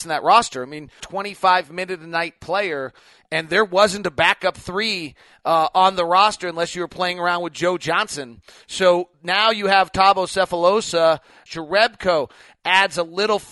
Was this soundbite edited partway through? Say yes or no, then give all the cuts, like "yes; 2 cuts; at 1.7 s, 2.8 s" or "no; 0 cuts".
yes; 2 cuts; at 1.0 s, 11.5 s